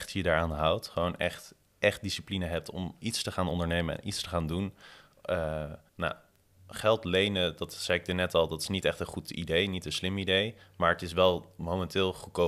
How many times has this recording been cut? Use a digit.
1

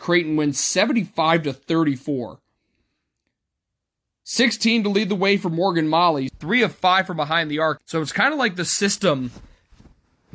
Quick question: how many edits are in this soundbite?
2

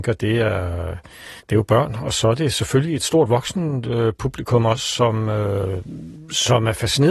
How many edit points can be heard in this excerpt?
1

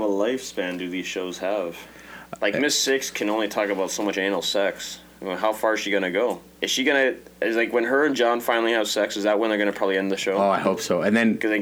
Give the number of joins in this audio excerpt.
1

